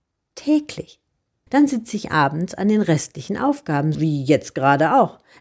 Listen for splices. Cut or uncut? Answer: cut